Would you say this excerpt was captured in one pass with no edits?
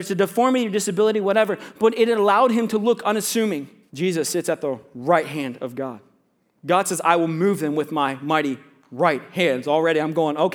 no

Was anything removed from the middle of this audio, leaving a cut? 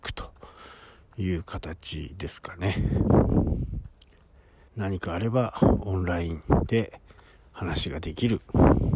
yes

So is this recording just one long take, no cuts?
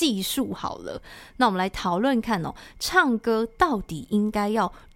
no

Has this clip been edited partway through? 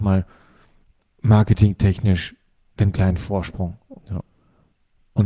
yes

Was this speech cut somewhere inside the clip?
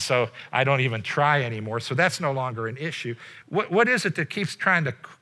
yes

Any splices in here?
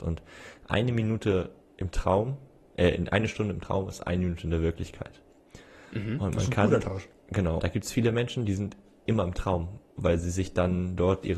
yes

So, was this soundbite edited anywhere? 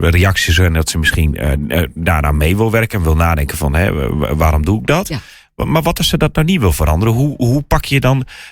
no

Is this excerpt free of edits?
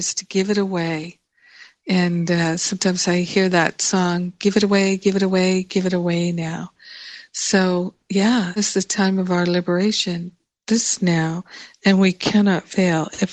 no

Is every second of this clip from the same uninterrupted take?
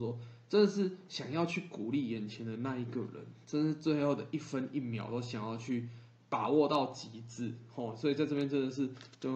yes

